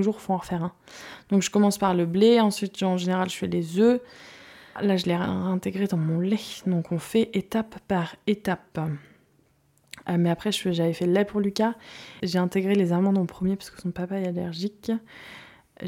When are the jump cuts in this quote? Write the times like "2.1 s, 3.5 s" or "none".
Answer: 4.8 s, 12.2 s

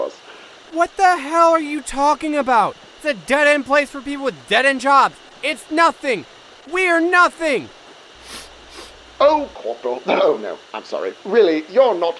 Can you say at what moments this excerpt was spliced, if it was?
9.2 s, 11.1 s

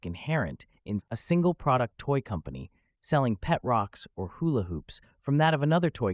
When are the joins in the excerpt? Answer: 1.0 s

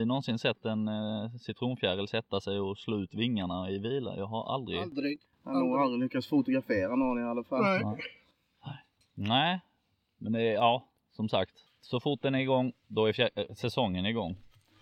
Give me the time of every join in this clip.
none

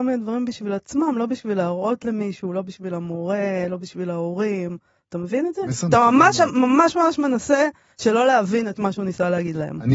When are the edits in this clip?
none

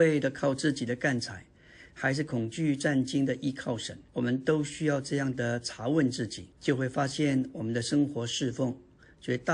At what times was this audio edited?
4.1 s, 6.5 s

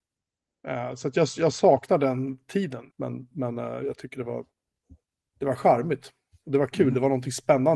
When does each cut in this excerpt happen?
2.9 s

